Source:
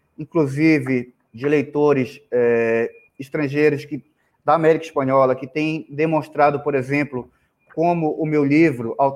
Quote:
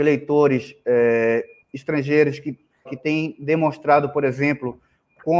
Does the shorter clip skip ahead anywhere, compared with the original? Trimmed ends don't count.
yes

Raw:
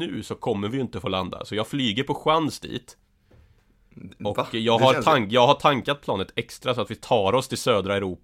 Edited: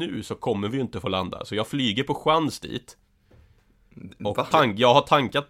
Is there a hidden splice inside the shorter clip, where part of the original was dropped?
yes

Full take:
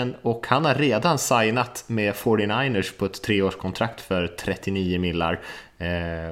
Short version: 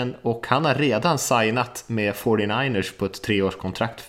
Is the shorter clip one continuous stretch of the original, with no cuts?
yes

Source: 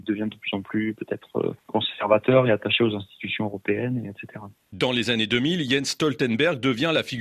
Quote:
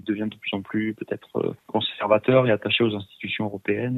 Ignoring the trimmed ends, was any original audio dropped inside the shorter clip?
no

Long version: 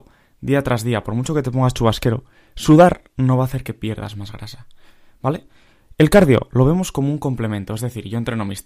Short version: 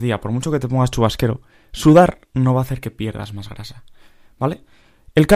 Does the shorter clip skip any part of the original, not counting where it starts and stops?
no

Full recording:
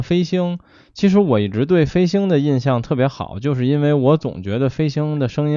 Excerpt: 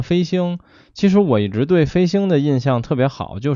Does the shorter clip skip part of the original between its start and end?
no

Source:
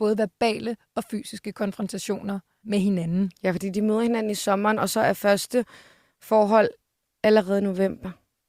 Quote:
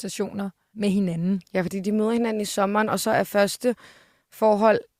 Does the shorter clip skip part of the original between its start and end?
no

